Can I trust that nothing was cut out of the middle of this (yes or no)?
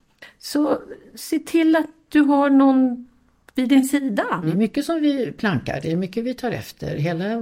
no